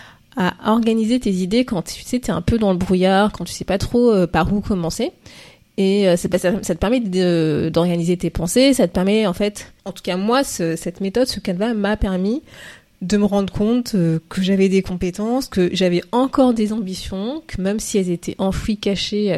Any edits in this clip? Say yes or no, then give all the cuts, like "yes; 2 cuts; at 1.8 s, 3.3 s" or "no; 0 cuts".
yes; 1 cut; at 9.8 s